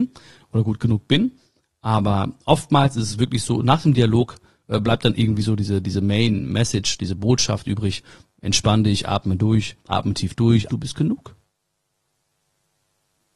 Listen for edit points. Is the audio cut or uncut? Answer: cut